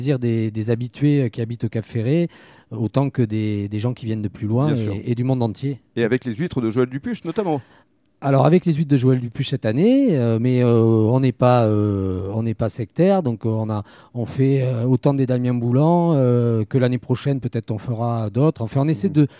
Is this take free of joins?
yes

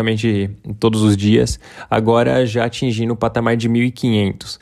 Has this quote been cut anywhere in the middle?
no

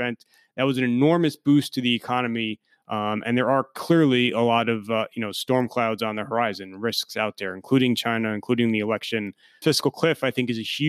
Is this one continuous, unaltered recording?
no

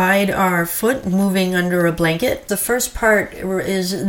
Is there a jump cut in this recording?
yes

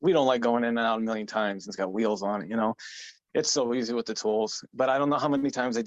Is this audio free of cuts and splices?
no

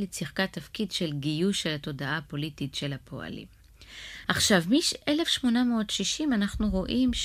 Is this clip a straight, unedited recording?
no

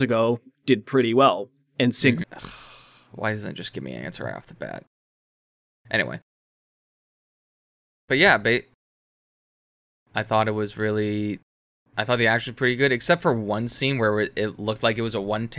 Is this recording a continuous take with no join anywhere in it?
no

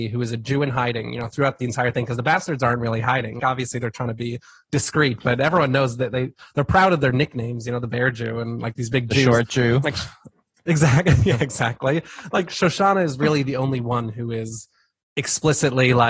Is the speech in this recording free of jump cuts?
no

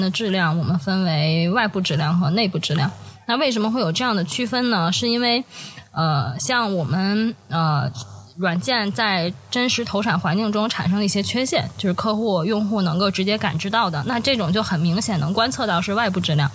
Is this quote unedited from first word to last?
yes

